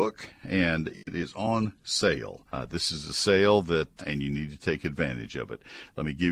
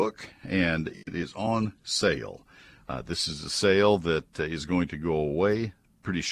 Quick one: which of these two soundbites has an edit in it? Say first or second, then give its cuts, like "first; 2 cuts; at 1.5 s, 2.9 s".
first; 2 cuts; at 2.5 s, 4.0 s